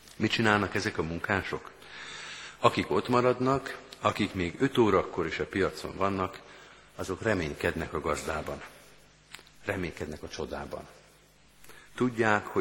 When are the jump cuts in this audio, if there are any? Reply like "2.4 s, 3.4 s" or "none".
none